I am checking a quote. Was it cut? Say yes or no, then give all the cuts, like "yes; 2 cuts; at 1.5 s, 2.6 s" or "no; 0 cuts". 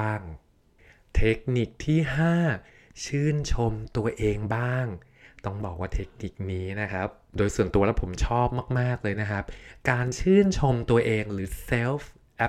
no; 0 cuts